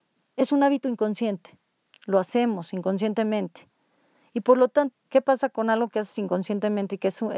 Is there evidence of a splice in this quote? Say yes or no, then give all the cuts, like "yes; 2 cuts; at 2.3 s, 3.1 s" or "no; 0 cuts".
yes; 1 cut; at 4.9 s